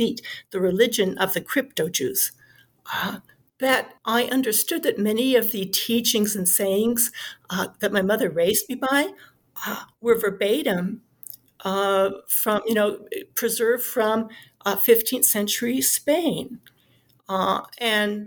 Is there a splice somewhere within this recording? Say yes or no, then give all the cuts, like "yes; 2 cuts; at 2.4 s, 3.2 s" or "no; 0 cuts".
yes; 1 cut; at 4.0 s